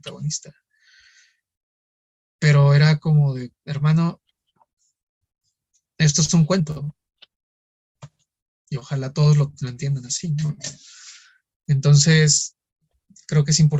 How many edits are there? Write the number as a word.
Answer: zero